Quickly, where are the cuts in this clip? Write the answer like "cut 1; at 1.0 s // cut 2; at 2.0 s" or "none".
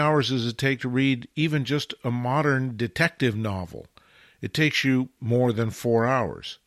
cut 1; at 5.2 s